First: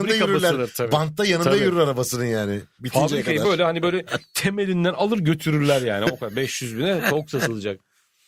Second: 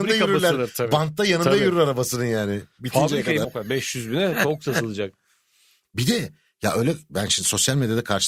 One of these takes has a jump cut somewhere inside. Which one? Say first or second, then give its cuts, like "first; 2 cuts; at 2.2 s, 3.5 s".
second; 2 cuts; at 3.4 s, 5.8 s